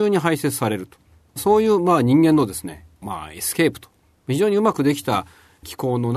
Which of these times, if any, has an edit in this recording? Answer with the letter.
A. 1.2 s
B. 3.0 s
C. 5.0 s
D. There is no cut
B